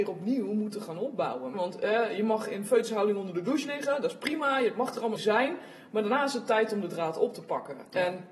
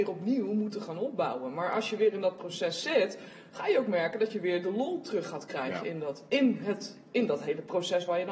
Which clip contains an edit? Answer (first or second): first